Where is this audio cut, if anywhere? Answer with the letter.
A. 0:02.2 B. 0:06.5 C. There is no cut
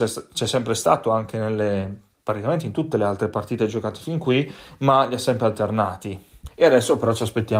B